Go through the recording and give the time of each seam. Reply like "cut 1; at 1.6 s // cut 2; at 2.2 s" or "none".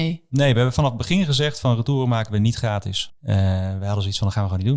cut 1; at 3.1 s